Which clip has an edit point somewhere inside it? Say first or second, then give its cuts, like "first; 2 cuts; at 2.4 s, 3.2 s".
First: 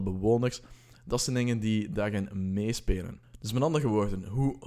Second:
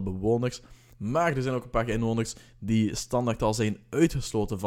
second; 1 cut; at 0.9 s